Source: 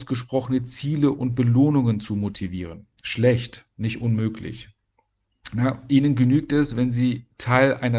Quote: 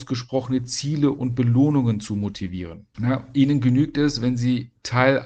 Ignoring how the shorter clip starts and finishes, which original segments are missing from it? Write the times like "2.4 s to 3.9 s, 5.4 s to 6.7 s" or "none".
2.9 s to 5.5 s